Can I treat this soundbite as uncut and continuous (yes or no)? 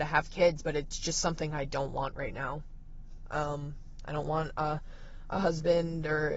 yes